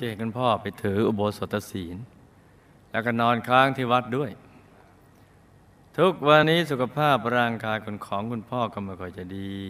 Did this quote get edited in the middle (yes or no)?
yes